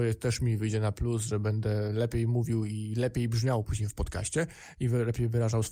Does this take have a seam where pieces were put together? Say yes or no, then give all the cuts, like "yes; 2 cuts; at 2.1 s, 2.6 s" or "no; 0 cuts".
no; 0 cuts